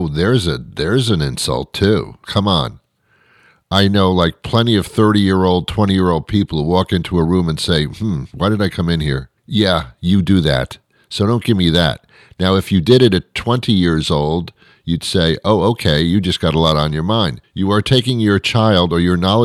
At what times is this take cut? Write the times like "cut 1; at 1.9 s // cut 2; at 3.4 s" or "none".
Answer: cut 1; at 2.2 s // cut 2; at 9.4 s // cut 3; at 17.4 s